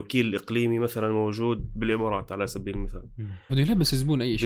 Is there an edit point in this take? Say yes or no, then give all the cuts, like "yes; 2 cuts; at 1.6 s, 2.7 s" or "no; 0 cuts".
yes; 1 cut; at 3.5 s